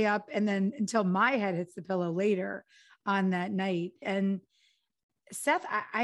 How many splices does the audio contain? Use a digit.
1